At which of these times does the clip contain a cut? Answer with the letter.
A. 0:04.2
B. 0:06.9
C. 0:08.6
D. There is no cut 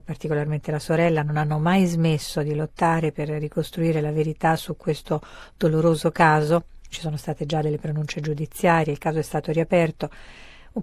D